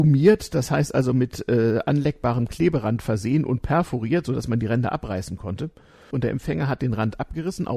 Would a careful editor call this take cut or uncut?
cut